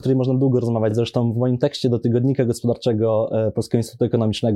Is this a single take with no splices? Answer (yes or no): yes